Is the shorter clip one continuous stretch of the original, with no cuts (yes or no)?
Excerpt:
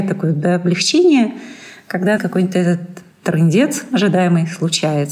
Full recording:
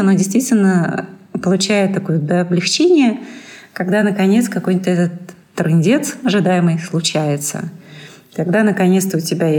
no